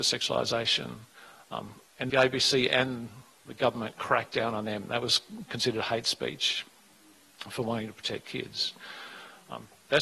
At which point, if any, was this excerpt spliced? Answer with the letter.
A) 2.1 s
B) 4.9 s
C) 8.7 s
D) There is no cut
A